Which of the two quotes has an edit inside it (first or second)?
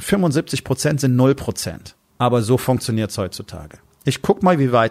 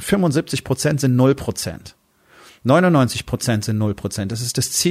first